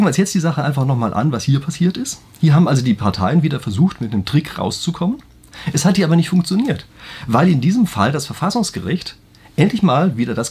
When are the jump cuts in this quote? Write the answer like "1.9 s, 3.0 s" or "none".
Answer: none